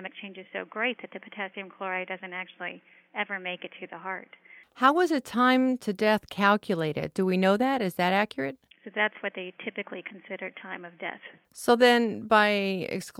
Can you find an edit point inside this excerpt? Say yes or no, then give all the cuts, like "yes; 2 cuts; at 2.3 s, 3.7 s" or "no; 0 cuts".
yes; 1 cut; at 8.7 s